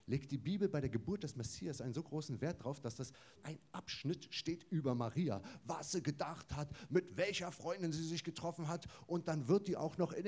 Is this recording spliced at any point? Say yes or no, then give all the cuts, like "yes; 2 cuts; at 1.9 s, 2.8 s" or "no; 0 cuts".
yes; 2 cuts; at 3.4 s, 6.9 s